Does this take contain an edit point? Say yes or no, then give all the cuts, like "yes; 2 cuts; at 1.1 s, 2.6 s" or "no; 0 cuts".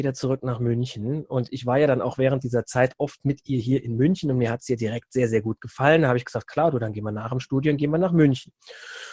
no; 0 cuts